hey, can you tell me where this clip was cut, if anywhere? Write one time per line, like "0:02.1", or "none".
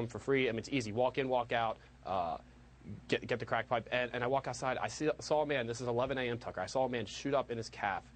none